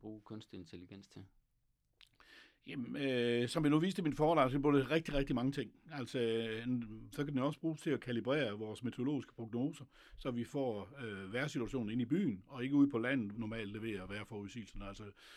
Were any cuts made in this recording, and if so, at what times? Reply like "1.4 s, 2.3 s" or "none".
7.1 s, 13.3 s